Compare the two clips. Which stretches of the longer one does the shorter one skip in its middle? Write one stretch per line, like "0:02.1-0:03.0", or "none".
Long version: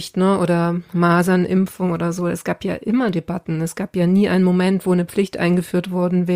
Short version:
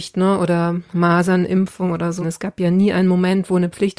0:02.2-0:03.6